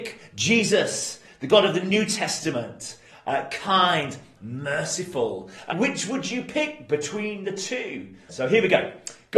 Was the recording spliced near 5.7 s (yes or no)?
yes